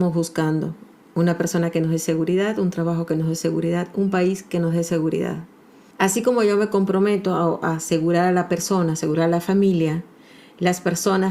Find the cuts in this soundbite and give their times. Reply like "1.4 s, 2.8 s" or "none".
5.9 s